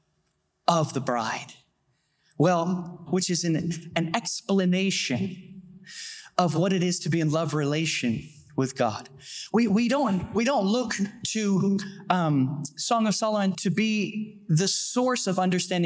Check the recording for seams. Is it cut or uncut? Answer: cut